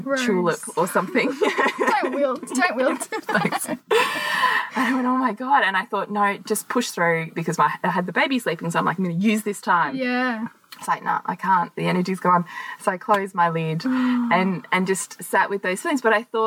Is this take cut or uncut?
uncut